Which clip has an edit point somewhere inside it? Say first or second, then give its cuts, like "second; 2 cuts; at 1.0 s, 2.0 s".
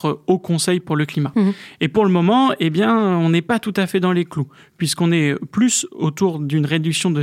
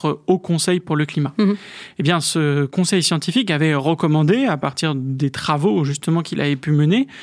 first; 1 cut; at 1.3 s